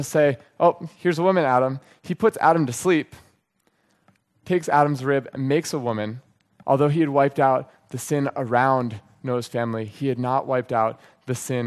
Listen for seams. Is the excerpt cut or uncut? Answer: cut